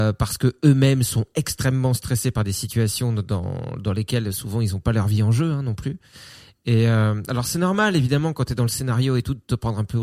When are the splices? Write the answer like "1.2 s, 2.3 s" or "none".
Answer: none